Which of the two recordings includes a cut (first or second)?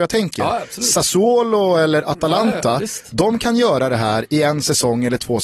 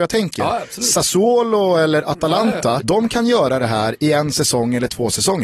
second